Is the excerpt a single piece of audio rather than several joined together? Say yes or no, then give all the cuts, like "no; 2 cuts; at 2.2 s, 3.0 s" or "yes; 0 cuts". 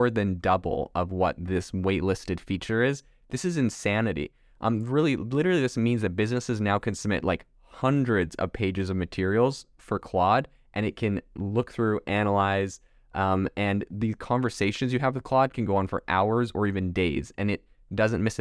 yes; 0 cuts